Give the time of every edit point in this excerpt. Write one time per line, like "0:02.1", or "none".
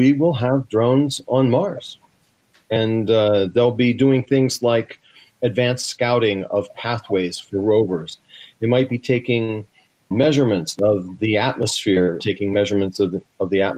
0:10.1
0:12.2